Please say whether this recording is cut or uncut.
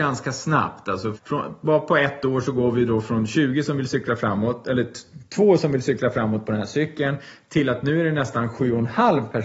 cut